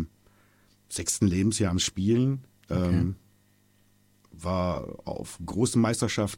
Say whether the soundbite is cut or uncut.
uncut